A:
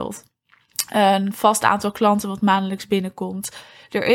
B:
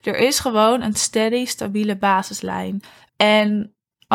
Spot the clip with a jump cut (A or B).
B